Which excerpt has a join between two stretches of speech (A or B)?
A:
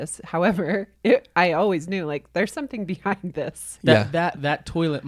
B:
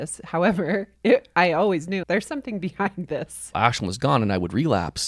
B